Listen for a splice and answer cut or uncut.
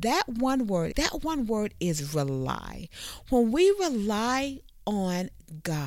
cut